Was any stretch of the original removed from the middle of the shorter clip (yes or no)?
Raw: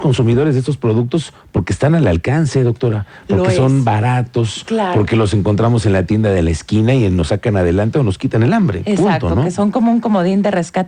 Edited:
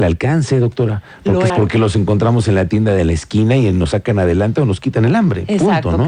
yes